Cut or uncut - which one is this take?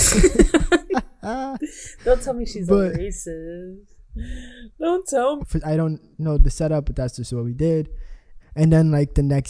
cut